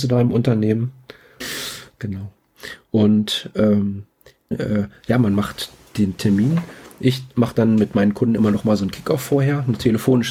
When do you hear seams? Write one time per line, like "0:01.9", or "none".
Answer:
0:01.4
0:04.5